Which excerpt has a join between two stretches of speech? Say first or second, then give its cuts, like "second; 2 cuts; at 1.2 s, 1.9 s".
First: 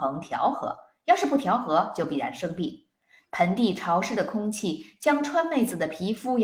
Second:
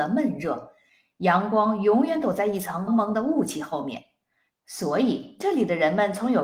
second; 2 cuts; at 2.9 s, 4.5 s